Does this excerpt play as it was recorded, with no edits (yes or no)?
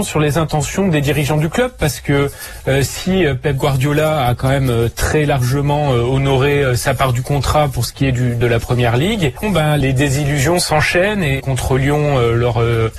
no